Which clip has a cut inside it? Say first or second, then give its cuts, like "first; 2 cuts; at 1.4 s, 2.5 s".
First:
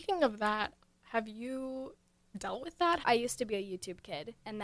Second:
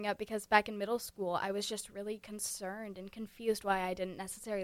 first; 1 cut; at 3.0 s